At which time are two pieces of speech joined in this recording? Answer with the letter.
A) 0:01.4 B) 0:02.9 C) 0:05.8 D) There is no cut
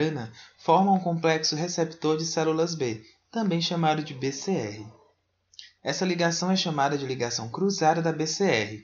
C